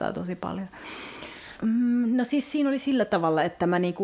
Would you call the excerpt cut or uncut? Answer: cut